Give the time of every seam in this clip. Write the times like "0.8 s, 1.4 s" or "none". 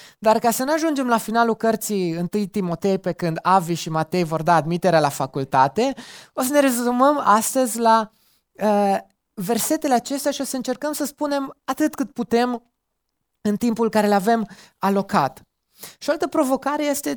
none